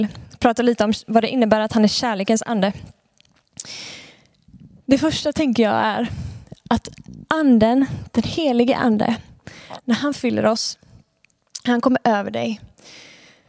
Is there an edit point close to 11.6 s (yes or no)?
no